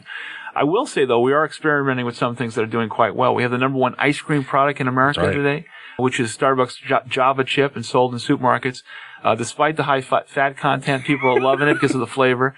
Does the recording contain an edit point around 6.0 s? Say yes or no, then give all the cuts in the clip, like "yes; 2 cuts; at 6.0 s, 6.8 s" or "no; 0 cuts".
yes; 1 cut; at 6.0 s